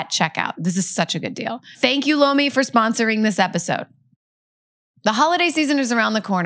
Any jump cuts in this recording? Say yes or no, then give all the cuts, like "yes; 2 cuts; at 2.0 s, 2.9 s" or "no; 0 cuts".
no; 0 cuts